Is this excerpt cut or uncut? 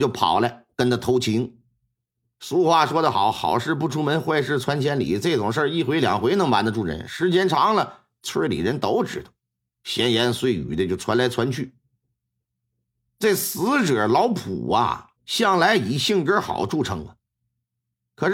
cut